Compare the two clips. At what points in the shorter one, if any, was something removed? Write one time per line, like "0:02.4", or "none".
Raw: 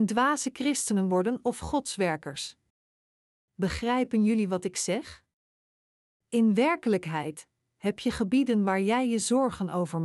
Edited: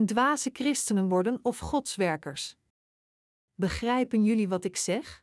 none